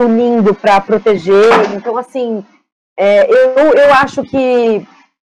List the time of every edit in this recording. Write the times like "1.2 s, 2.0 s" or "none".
none

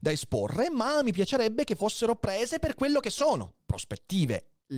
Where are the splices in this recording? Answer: 3.6 s

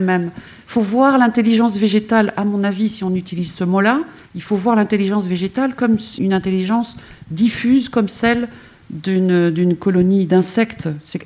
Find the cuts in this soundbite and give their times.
4.3 s, 6.2 s

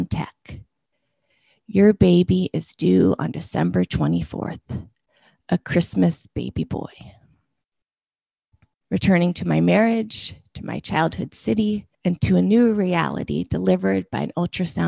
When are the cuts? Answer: 8.8 s, 11.9 s

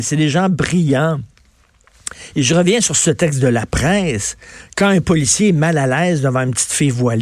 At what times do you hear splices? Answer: none

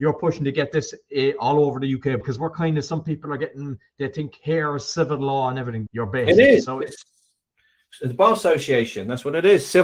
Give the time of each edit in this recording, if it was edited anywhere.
2.2 s, 5.9 s

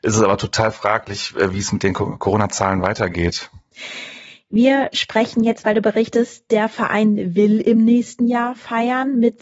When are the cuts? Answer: none

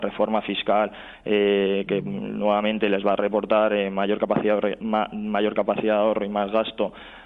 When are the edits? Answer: 1.9 s

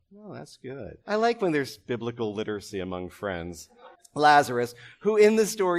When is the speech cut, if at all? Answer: 1.0 s, 3.9 s

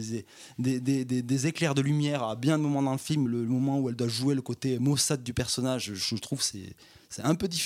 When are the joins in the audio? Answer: 3.3 s

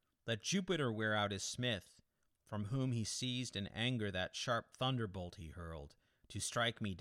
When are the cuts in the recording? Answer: none

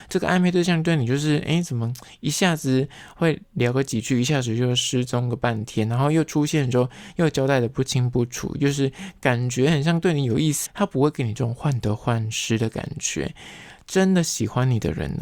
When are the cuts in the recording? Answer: 10.7 s

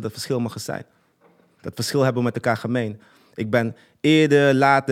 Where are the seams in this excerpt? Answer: none

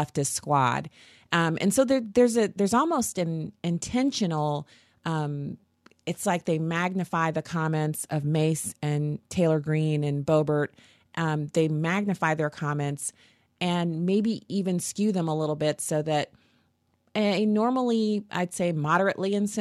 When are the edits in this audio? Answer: none

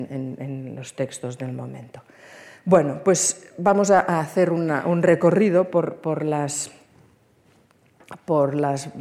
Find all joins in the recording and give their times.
none

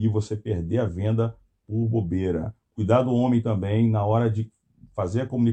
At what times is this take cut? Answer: none

